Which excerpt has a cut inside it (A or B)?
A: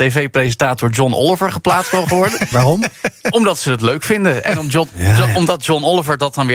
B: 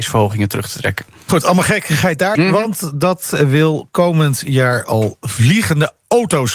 B